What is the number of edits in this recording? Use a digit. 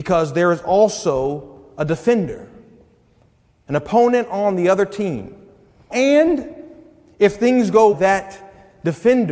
2